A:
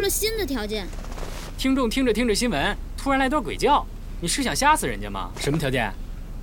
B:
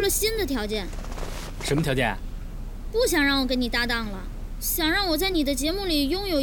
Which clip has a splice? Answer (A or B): A